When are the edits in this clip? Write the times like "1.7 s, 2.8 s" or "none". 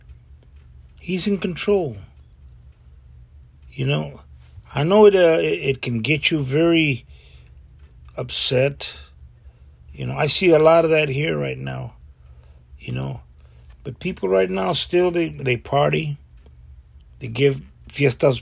none